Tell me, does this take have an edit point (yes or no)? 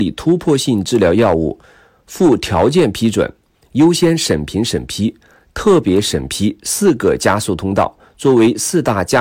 no